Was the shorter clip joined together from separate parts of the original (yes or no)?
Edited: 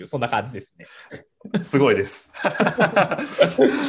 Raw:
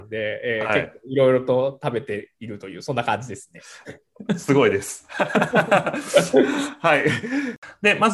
no